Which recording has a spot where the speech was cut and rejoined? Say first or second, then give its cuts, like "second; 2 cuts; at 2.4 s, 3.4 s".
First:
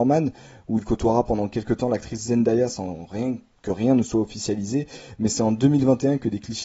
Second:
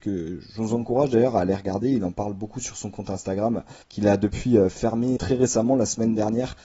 second; 2 cuts; at 3.8 s, 5.2 s